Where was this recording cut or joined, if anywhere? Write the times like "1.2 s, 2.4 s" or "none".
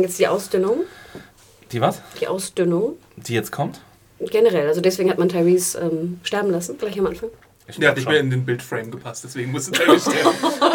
none